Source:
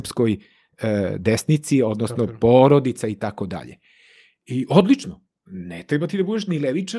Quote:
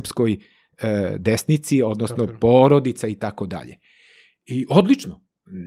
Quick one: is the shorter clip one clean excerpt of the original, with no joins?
yes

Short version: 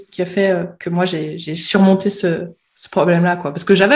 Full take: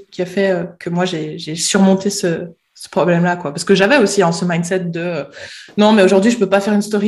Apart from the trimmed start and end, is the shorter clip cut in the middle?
no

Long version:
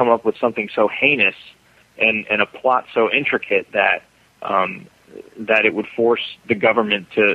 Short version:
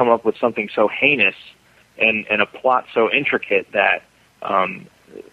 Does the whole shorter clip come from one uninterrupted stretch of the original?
yes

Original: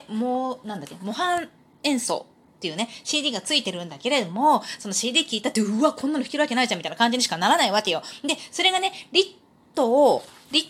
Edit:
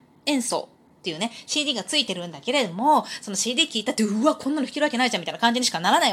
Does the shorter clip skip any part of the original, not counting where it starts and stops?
no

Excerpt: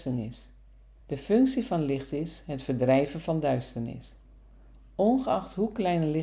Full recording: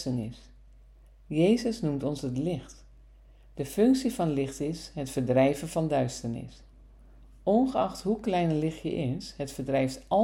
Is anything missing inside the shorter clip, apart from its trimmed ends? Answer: yes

